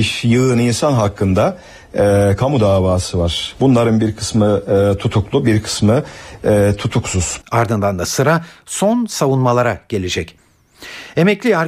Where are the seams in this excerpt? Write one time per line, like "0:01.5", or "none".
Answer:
0:07.4

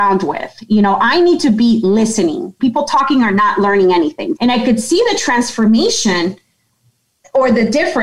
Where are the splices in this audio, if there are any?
0:02.6
0:04.4

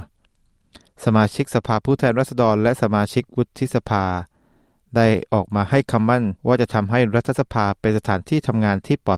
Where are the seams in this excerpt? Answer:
0:06.4

